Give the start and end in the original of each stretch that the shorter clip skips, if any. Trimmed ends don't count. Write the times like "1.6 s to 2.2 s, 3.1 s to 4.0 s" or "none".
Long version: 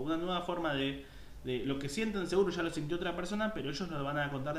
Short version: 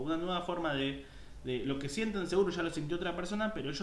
none